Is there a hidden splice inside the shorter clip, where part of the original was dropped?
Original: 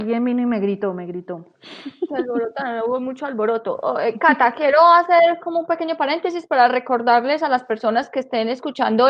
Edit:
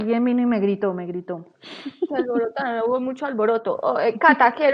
no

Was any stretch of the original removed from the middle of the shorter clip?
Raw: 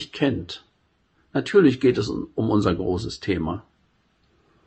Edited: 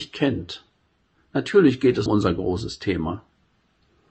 yes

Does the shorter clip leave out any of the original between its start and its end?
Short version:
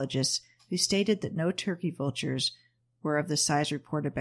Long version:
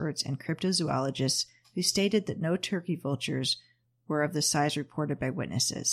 no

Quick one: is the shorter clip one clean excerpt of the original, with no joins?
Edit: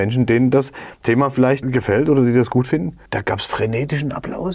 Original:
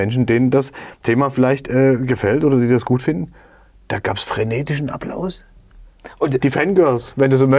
no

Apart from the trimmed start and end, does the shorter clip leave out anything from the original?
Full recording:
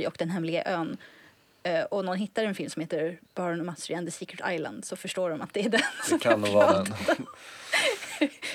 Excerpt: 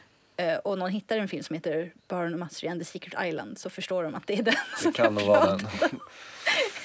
no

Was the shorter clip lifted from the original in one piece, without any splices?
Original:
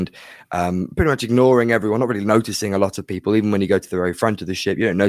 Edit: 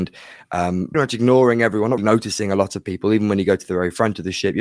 no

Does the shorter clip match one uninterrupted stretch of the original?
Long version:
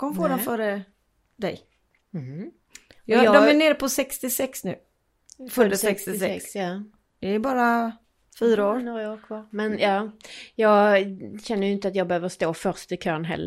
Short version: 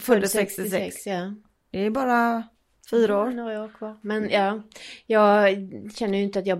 yes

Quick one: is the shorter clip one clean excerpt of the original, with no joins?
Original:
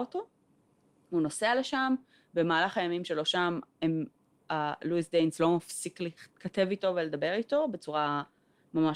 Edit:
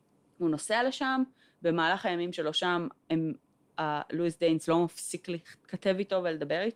yes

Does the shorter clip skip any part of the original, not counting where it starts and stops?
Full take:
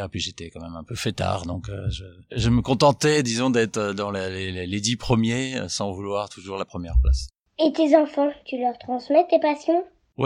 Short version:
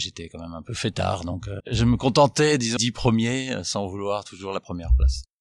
yes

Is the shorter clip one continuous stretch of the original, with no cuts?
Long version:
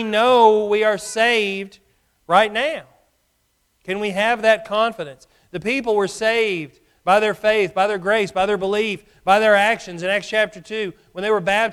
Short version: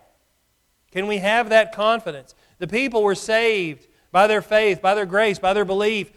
yes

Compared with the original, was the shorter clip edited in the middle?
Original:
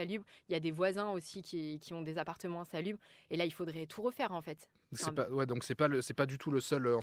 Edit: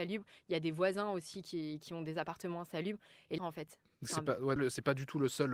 yes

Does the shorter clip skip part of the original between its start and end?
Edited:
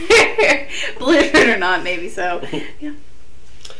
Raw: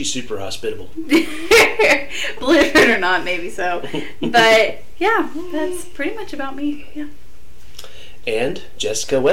yes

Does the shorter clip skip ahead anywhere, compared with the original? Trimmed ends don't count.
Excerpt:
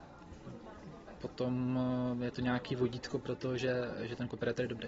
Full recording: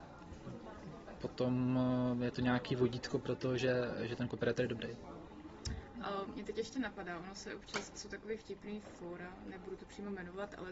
no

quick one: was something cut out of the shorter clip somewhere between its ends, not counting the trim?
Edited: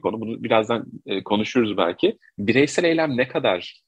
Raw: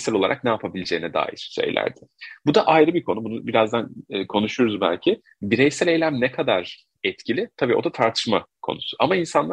no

